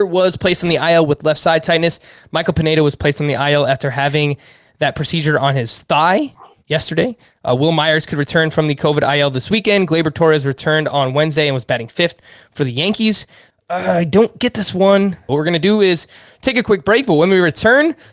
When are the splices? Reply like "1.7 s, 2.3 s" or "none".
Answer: 13.5 s, 15.3 s